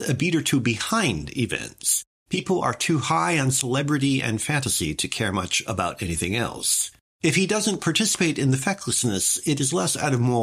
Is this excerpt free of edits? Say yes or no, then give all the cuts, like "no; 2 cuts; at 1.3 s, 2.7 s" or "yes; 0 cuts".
no; 2 cuts; at 2.1 s, 7.1 s